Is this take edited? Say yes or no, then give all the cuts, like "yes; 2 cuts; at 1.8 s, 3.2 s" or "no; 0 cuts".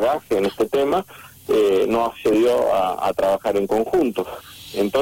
no; 0 cuts